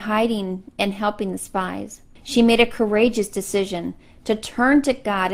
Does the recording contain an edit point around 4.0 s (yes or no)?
no